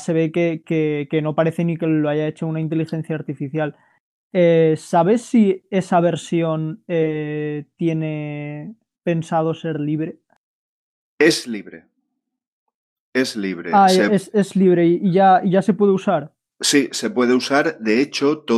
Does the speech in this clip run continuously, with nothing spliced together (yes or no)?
yes